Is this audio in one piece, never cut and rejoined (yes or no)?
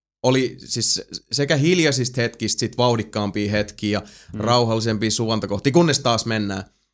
yes